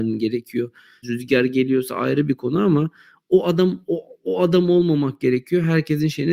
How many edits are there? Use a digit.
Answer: 1